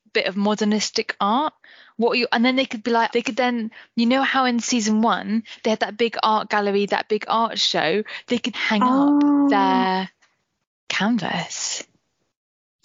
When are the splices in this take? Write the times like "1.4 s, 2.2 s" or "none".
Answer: 3.1 s, 8.5 s